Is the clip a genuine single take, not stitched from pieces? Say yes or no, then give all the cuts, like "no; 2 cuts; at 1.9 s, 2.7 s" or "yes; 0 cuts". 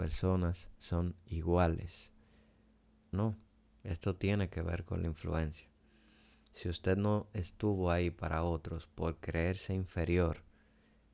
no; 2 cuts; at 3.1 s, 6.3 s